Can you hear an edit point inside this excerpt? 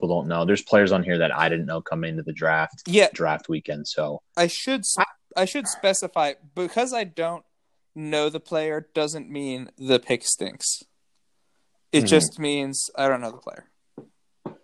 yes; 1 cut; at 3.1 s

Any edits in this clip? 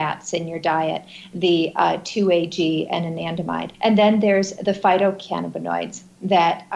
yes; 1 cut; at 3.7 s

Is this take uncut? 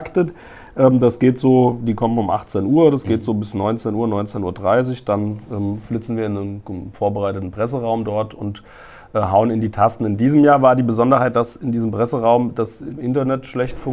yes; 0 cuts

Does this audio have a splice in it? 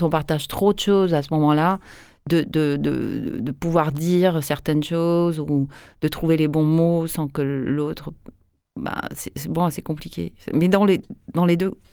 no; 0 cuts

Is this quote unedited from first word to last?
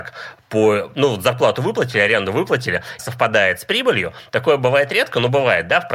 no; 1 cut; at 3.0 s

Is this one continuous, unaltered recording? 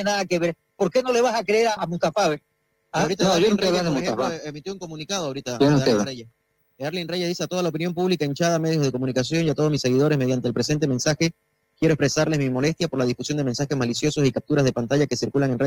no; 1 cut; at 1.8 s

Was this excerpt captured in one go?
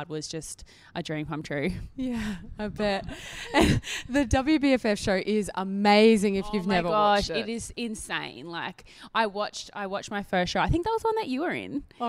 yes; 0 cuts

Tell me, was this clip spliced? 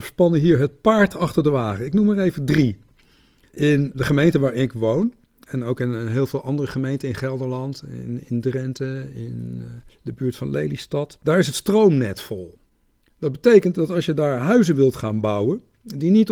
no; 0 cuts

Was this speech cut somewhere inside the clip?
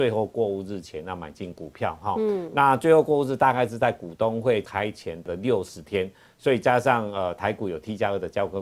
no; 0 cuts

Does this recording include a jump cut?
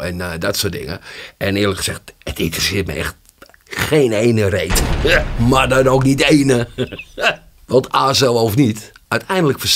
no; 0 cuts

